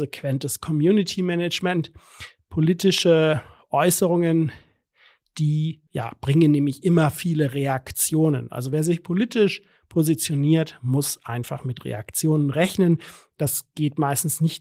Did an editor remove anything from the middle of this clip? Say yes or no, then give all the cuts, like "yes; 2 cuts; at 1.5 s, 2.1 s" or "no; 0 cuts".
yes; 1 cut; at 5.9 s